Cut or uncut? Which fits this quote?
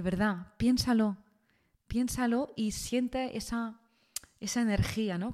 uncut